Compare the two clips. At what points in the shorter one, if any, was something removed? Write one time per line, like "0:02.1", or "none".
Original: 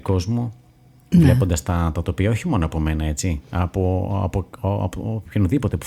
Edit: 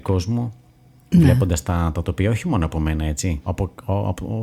0:03.5

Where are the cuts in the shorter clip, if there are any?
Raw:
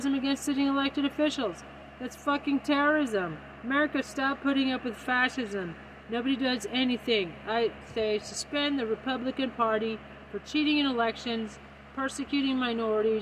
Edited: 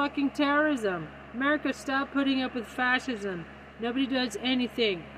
none

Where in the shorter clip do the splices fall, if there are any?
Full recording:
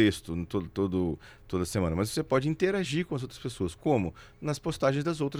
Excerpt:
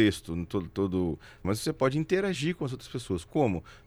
0:01.4

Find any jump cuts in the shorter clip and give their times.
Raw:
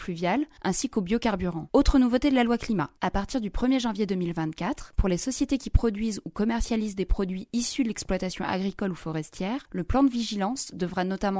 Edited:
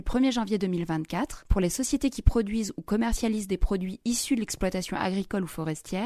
none

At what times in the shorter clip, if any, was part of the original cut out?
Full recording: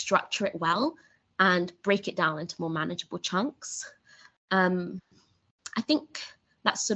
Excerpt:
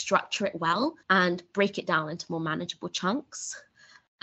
0:01.0

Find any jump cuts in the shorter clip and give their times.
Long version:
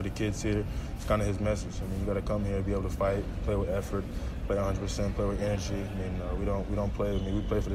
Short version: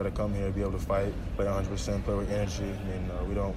0:01.3

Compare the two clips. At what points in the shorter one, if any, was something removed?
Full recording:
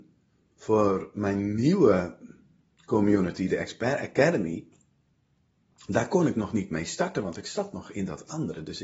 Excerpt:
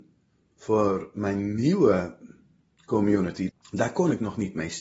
0:03.5

